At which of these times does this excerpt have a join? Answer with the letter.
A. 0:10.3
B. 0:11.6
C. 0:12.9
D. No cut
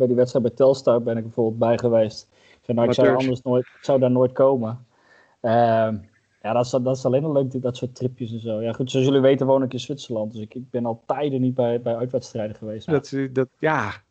C